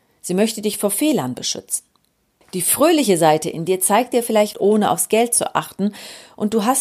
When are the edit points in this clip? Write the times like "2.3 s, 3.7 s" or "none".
4.5 s